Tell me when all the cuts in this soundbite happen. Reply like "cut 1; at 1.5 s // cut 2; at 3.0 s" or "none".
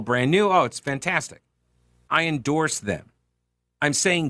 cut 1; at 2.1 s